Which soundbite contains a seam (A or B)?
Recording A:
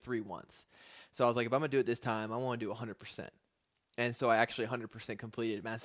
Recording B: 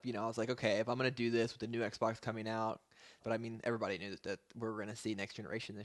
B